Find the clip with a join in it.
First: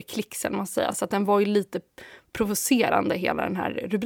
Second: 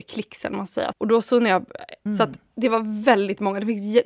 second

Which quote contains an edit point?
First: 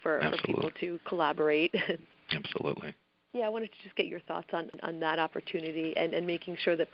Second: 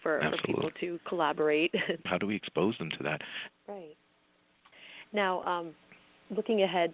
second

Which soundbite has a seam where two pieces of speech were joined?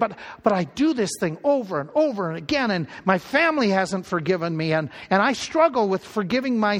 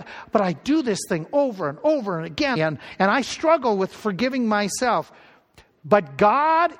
second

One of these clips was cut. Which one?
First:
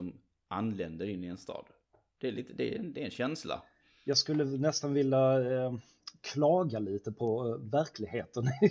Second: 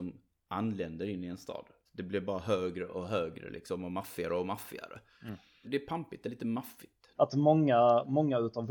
second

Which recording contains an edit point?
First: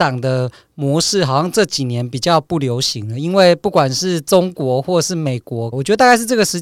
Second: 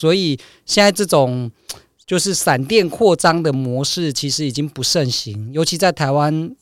first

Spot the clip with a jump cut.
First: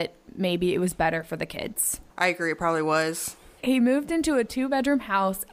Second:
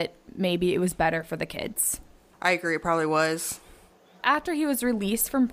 first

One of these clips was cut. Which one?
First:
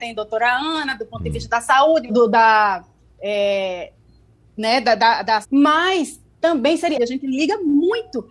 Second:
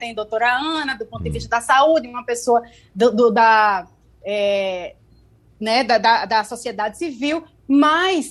first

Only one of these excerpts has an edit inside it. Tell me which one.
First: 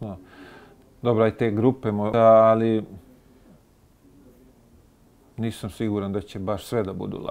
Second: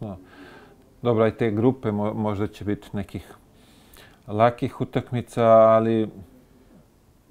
first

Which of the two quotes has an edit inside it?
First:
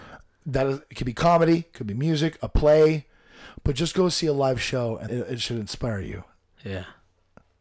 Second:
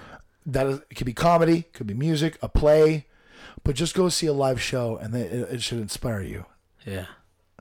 first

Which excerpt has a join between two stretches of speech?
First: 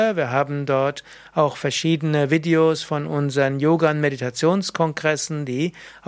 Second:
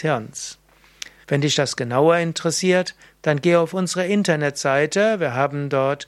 second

